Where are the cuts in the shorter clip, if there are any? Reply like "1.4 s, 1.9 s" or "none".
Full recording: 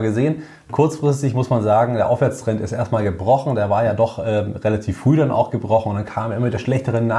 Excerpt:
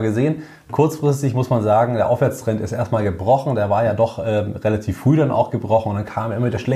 none